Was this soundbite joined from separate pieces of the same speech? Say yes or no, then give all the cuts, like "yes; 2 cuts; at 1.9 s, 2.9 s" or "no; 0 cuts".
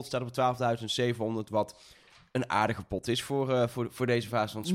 no; 0 cuts